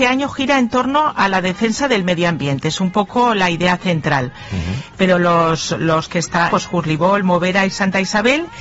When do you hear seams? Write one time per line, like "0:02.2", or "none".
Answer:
0:04.9
0:06.5